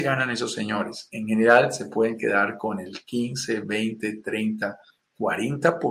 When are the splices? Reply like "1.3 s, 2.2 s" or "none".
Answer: none